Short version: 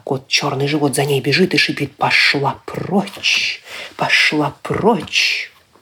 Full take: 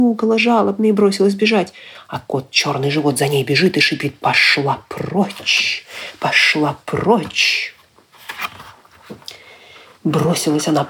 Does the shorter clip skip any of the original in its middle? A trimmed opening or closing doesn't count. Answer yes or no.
no